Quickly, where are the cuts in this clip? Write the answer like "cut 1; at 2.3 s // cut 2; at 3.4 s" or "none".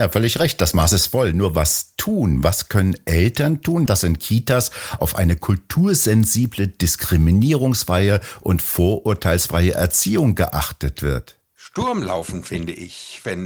cut 1; at 3.9 s